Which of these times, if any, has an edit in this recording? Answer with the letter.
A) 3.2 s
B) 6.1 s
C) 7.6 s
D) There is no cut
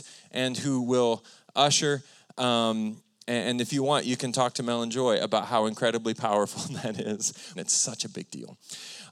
C